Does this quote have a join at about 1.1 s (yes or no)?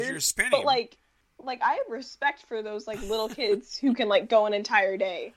no